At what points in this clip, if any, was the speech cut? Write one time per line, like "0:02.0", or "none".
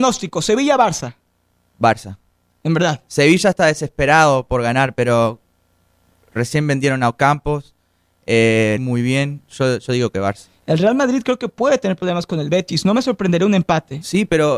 0:08.8